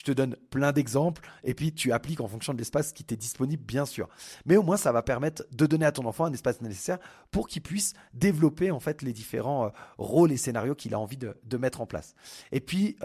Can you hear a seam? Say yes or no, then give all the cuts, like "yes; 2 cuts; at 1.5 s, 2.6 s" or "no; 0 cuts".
no; 0 cuts